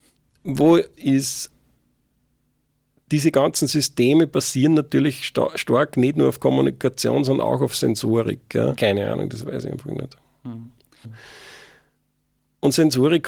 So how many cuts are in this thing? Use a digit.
3